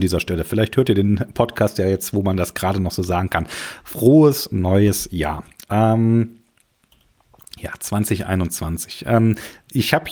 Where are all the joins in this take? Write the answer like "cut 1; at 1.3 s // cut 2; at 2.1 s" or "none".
none